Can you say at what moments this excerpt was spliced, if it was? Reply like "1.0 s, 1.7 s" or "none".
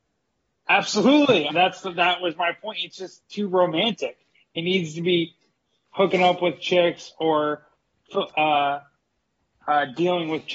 1.5 s, 4.3 s